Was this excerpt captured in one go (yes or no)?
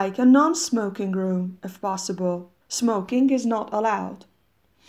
no